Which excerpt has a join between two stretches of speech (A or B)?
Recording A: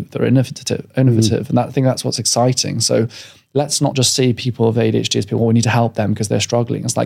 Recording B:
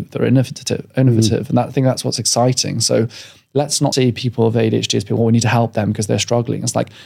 B